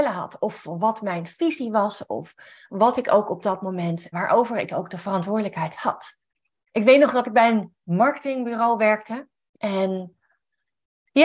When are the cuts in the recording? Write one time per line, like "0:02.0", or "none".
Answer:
0:04.1
0:09.5